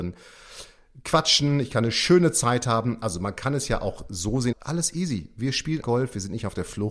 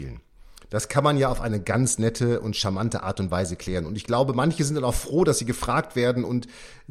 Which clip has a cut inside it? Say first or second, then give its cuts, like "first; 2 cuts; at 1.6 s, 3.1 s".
first; 2 cuts; at 4.5 s, 5.8 s